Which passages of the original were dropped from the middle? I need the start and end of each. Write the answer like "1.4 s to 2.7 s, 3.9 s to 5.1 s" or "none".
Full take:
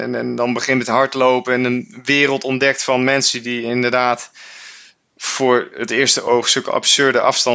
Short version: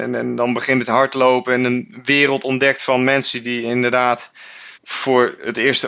4.7 s to 5.1 s